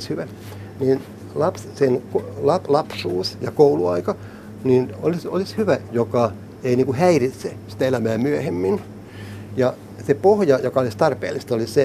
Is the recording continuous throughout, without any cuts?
no; 1 cut; at 5.9 s

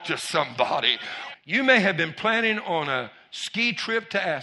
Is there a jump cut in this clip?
yes; 1 cut; at 1.3 s

